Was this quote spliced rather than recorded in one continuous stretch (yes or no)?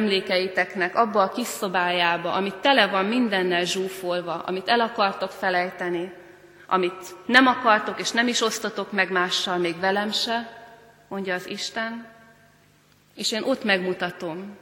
no